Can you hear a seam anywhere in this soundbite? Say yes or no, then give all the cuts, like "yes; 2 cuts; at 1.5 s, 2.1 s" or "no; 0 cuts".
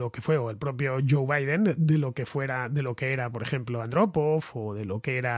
no; 0 cuts